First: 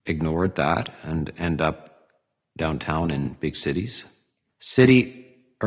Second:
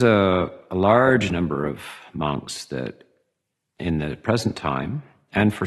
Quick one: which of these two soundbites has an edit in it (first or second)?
first